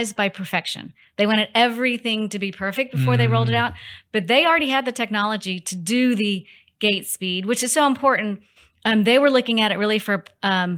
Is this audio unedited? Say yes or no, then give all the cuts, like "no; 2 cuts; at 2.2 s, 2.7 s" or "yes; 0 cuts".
yes; 0 cuts